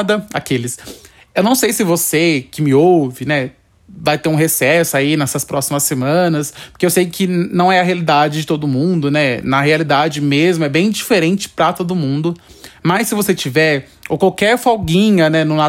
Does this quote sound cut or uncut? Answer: uncut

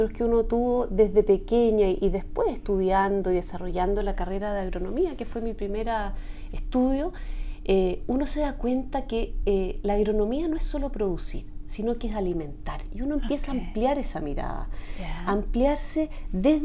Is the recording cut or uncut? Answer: uncut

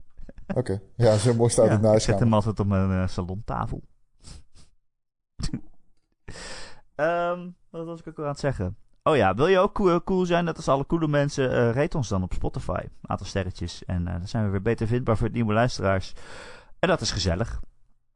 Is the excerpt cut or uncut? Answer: uncut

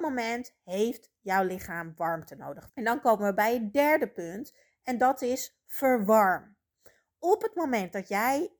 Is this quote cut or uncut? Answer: cut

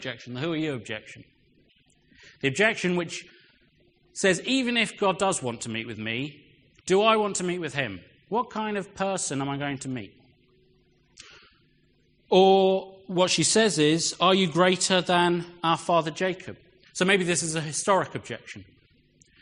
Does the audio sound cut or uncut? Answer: uncut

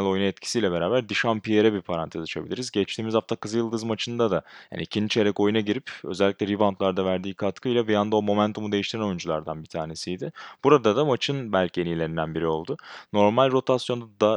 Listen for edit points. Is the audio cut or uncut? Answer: uncut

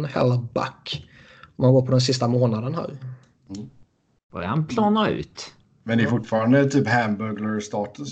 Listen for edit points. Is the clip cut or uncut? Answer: uncut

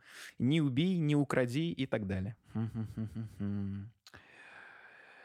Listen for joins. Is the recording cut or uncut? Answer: cut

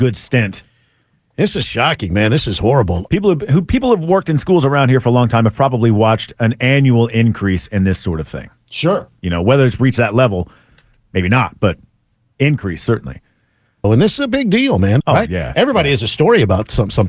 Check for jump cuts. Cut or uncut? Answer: cut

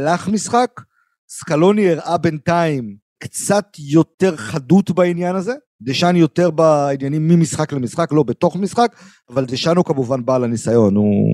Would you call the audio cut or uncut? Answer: uncut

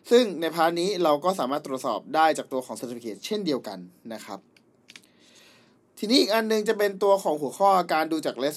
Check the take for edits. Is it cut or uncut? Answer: uncut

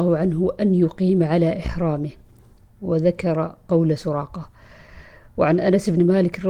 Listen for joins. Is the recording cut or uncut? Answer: uncut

